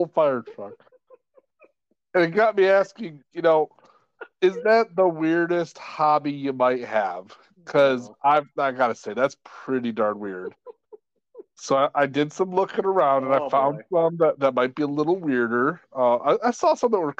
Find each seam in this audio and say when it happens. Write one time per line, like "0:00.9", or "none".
none